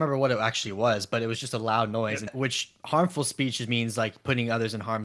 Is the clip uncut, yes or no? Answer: no